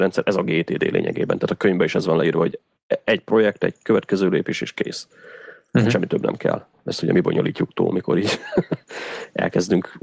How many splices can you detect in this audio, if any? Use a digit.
0